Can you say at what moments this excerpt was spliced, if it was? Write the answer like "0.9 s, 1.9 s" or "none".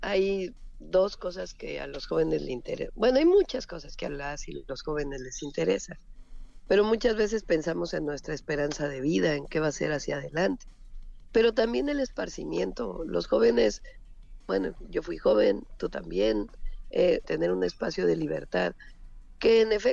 11.3 s, 17.2 s